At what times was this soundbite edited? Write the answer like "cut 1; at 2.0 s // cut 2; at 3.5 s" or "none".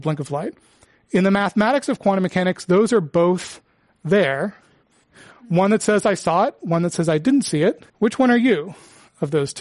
cut 1; at 7.9 s